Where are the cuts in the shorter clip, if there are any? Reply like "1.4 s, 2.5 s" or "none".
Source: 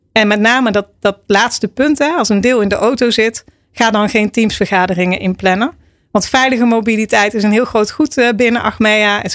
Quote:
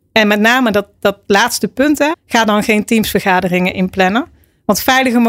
2.1 s